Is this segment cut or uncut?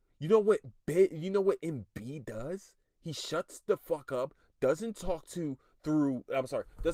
uncut